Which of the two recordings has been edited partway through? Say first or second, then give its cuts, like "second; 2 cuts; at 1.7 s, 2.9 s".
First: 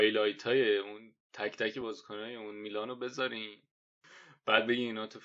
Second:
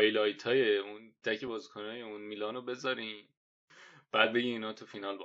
second; 1 cut; at 1.2 s